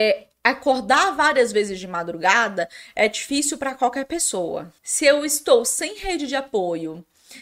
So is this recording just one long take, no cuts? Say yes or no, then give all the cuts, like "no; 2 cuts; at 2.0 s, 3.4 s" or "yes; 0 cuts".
no; 1 cut; at 4.8 s